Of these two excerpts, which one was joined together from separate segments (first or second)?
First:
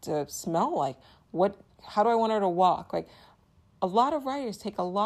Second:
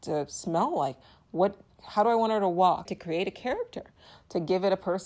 second